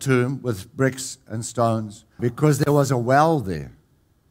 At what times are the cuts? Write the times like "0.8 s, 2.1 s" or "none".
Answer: 2.2 s

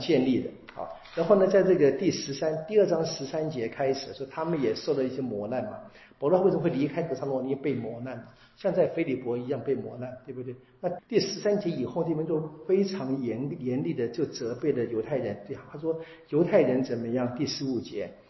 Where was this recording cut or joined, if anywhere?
11.0 s

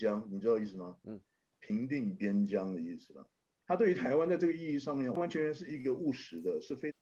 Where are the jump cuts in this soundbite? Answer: 5.2 s

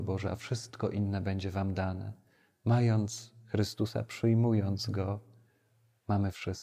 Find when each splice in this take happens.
none

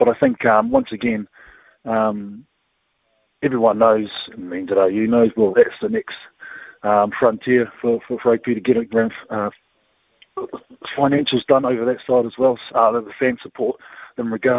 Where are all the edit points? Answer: 5.5 s, 8.9 s, 12.7 s

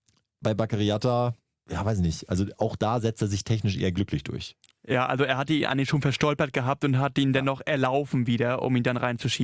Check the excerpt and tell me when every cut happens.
1.6 s

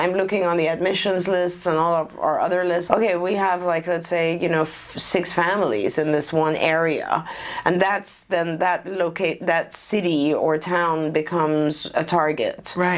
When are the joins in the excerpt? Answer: 2.9 s

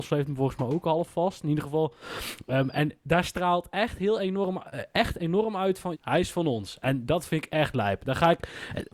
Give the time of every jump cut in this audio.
5.9 s

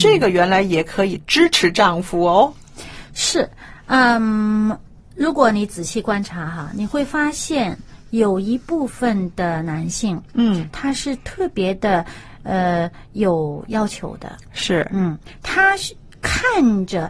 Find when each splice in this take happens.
10.7 s

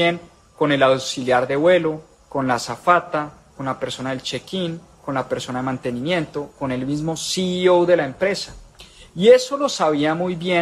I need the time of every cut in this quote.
none

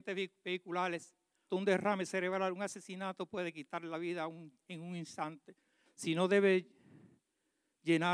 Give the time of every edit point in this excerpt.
1.5 s, 5.9 s

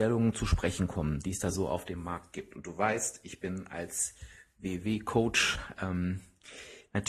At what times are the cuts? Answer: none

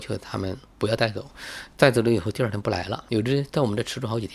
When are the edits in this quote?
3.1 s

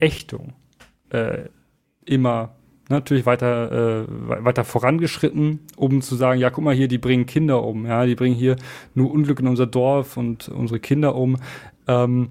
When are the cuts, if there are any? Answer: none

